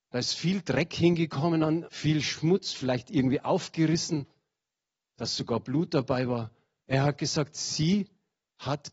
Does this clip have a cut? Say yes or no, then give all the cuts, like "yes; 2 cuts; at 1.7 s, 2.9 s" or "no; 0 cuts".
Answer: yes; 2 cuts; at 1.9 s, 6.8 s